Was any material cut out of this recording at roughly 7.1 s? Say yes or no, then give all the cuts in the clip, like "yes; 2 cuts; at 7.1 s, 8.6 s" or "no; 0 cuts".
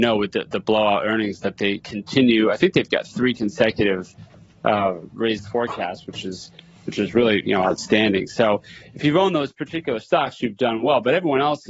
no; 0 cuts